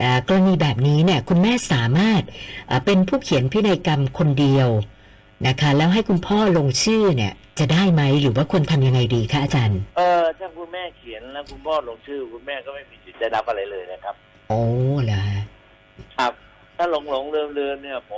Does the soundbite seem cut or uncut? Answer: cut